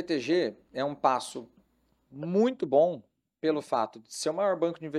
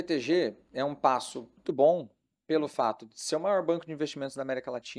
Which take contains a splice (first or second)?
second